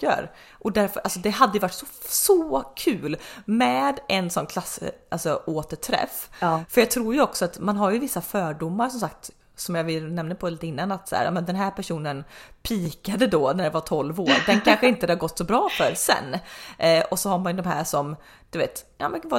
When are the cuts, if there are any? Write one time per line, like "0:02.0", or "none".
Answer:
none